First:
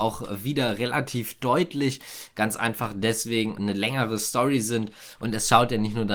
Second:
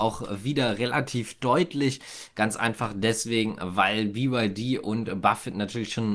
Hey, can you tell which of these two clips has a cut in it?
first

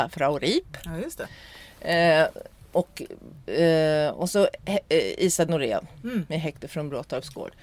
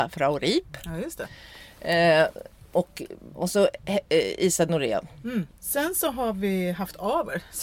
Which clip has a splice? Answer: second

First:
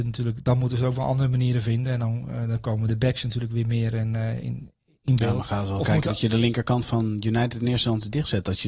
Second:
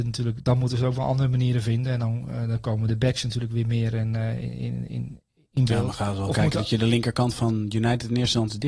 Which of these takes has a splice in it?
first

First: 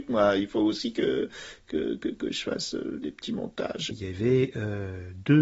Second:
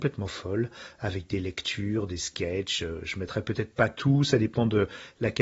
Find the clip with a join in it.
first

